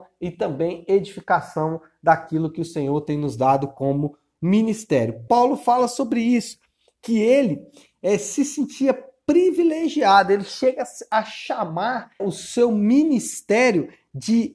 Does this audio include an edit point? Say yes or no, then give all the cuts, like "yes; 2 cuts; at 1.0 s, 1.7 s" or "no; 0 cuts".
yes; 2 cuts; at 5.3 s, 12.2 s